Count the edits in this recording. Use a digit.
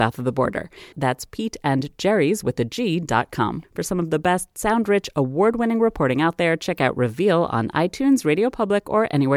2